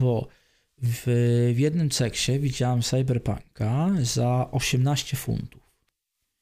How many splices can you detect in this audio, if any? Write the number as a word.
zero